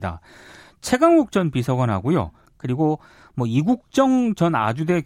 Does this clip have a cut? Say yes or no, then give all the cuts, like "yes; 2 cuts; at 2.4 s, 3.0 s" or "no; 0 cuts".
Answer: yes; 1 cut; at 2.5 s